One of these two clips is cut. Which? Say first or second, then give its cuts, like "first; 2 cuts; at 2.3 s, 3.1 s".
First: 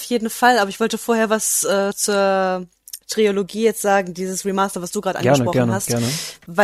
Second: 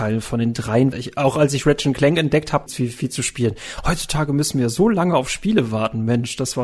second; 2 cuts; at 0.9 s, 2.7 s